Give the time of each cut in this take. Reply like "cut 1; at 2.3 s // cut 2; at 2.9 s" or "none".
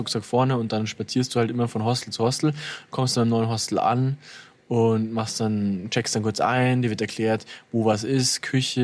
none